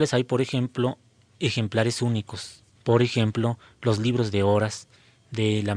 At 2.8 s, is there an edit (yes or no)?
yes